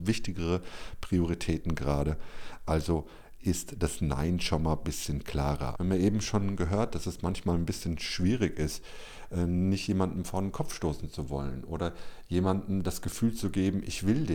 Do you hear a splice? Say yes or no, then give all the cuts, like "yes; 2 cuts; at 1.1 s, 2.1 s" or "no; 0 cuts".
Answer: yes; 1 cut; at 5.7 s